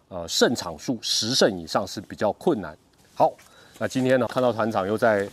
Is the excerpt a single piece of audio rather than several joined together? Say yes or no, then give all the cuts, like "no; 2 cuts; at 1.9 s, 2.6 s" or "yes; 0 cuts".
no; 2 cuts; at 3.0 s, 4.3 s